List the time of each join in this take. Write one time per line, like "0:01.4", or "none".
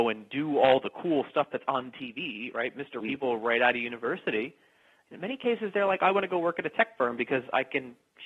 0:03.0

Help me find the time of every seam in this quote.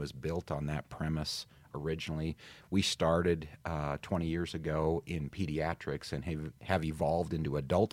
none

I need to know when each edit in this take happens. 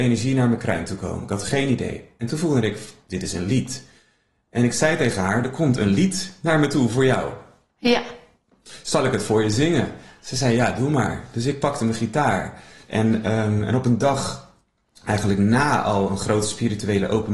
0:12.8

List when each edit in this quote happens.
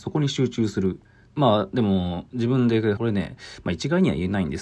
0:01.3
0:03.0

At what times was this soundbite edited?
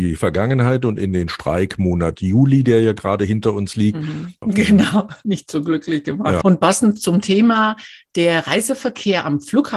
0:04.4
0:06.4

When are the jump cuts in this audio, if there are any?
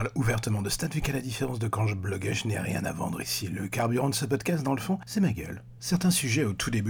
0:05.8

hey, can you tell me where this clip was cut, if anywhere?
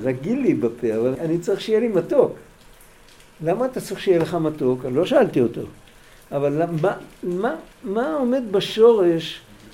0:01.1

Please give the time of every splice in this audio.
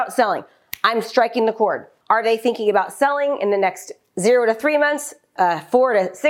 0:02.0
0:05.4

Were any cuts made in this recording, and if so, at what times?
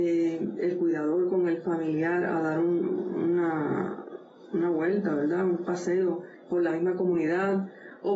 none

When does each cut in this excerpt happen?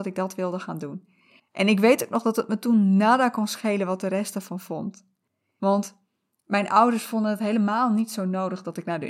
0:01.4

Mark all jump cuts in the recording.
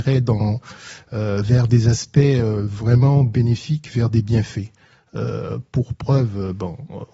none

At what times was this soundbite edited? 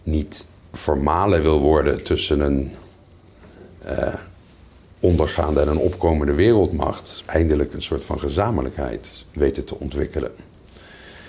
0:07.2
0:09.3

